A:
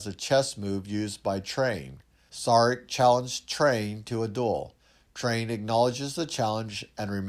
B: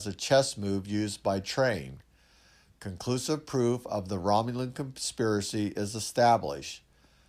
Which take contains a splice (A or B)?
A